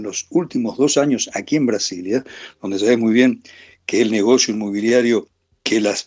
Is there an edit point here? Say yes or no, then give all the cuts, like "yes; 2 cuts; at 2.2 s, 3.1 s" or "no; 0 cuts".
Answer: no; 0 cuts